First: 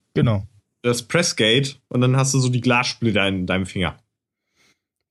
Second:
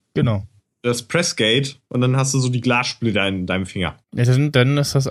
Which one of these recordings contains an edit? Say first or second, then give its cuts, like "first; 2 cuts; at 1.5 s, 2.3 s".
second; 1 cut; at 4.0 s